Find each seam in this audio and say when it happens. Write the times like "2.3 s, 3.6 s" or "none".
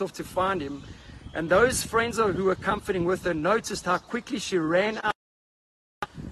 none